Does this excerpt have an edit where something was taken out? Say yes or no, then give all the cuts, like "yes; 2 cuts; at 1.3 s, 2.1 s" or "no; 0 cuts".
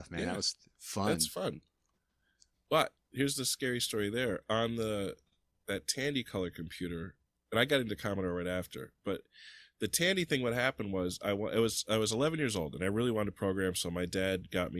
no; 0 cuts